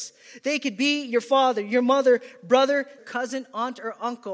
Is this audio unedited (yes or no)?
no